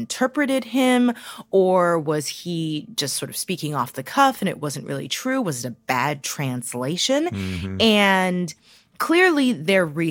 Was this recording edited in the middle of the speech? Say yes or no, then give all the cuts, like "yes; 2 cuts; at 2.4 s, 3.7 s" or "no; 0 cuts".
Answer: no; 0 cuts